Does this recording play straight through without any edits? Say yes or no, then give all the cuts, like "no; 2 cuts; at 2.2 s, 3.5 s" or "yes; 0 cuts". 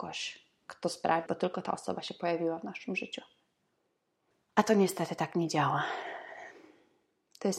no; 1 cut; at 1.3 s